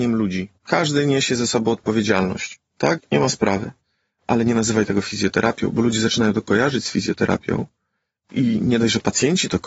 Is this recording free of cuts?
no; 1 cut; at 3.0 s

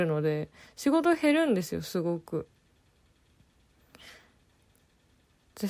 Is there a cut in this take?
no; 0 cuts

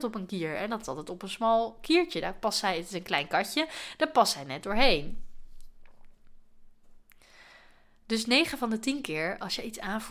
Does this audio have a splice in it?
no; 0 cuts

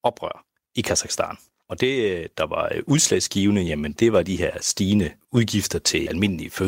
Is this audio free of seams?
yes; 0 cuts

